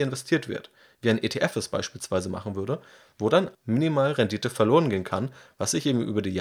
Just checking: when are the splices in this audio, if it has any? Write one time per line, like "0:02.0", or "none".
0:03.5